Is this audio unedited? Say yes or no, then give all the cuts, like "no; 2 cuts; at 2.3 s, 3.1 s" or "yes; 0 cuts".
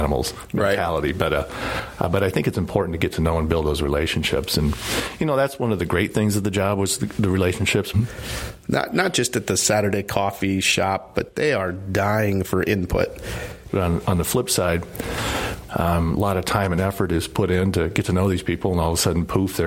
no; 3 cuts; at 7.9 s, 13.7 s, 15.7 s